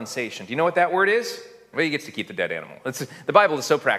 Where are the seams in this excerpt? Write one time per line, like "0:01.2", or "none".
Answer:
0:01.7

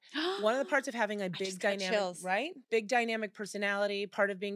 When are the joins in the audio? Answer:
0:02.6

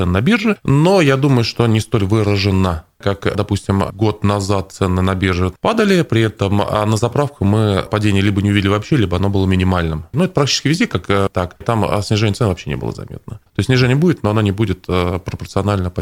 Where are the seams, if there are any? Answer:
0:10.1
0:11.6
0:13.5

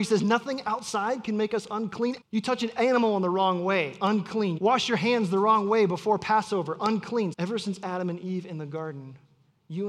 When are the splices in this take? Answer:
0:02.2
0:04.6
0:07.3

